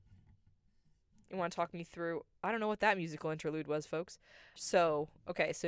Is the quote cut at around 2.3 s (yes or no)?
no